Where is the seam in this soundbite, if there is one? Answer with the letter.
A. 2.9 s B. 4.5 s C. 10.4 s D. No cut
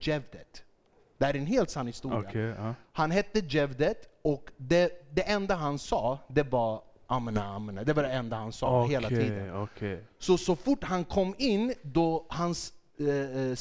D